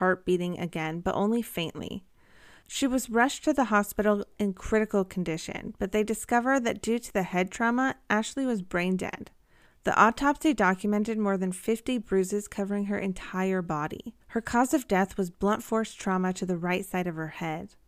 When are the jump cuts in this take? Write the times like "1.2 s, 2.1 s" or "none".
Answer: 9.7 s, 14.2 s